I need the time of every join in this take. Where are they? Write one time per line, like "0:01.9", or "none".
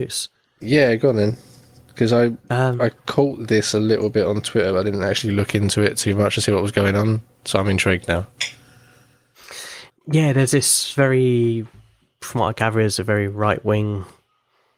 none